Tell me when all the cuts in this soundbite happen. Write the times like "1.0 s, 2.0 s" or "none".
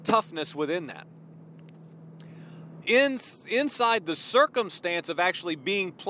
2.8 s